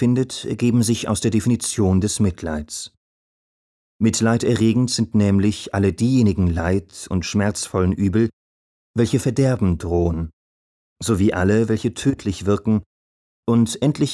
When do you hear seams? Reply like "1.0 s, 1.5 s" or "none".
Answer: none